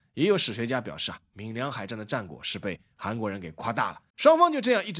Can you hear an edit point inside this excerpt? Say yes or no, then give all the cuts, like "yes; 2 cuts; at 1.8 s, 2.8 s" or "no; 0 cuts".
yes; 1 cut; at 4.1 s